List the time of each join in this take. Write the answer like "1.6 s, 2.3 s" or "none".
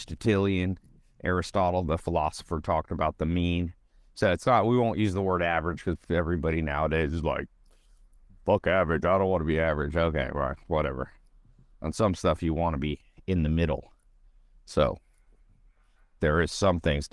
none